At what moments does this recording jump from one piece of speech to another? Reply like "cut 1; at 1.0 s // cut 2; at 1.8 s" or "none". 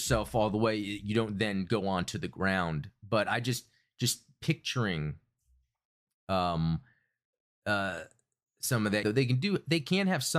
cut 1; at 9.0 s

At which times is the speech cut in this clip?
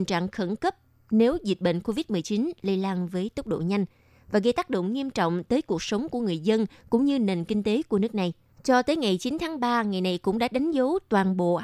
cut 1; at 8.5 s

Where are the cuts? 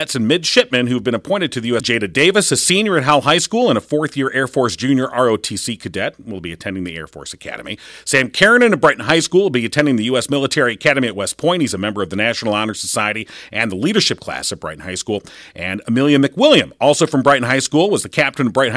cut 1; at 1.8 s

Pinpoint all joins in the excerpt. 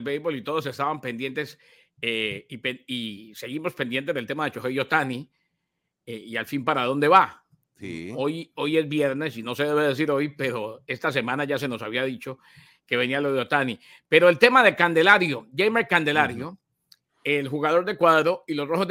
none

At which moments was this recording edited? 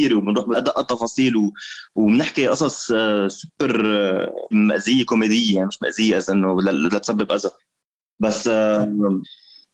cut 1; at 4.5 s

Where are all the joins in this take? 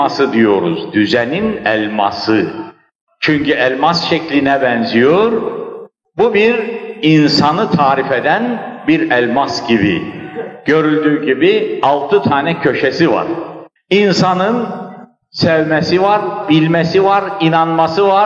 cut 1; at 13.8 s // cut 2; at 16.4 s

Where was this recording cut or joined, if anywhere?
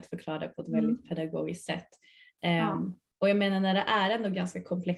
none

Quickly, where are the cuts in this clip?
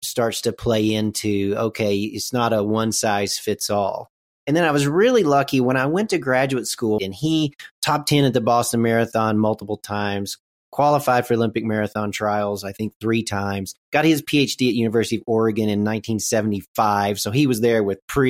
cut 1; at 7.0 s

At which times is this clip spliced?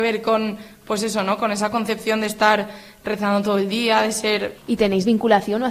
cut 1; at 4.5 s

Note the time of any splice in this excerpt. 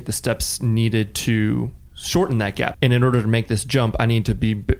cut 1; at 2.7 s

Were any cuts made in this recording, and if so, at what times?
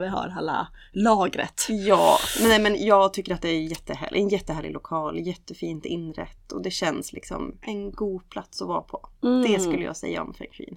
cut 1; at 7.6 s

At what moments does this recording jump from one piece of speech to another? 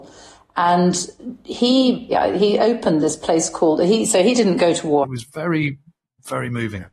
cut 1; at 2.1 s // cut 2; at 5.0 s

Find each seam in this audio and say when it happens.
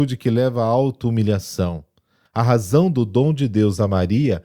cut 1; at 2.3 s

